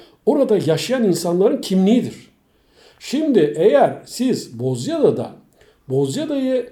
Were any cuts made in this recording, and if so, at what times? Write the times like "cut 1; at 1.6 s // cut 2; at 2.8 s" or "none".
none